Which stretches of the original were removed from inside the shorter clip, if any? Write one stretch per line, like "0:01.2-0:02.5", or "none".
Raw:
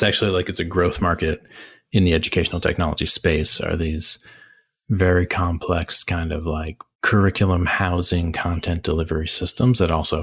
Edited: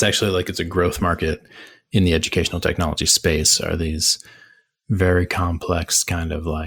none